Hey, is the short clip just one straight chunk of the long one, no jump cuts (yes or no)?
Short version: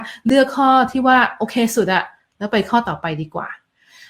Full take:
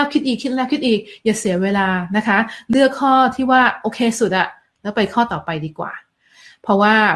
yes